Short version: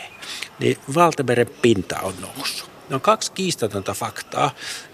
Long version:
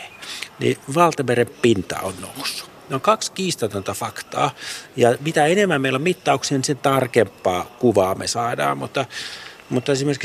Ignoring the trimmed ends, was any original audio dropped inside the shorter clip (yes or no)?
no